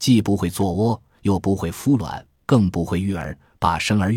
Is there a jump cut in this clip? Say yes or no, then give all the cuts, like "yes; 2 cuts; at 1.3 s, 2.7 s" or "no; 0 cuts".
no; 0 cuts